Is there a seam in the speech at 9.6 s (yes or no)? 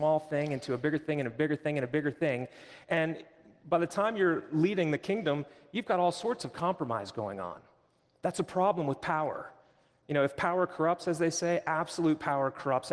no